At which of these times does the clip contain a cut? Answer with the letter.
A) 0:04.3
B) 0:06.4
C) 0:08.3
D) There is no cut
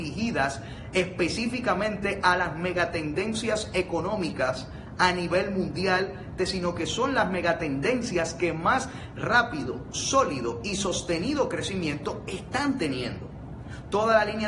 B